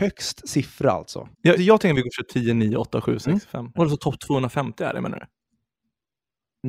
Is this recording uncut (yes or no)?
no